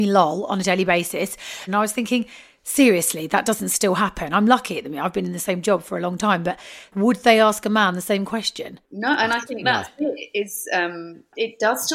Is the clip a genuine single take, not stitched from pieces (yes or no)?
no